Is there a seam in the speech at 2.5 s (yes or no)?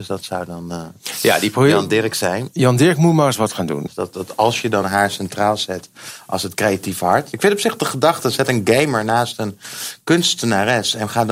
no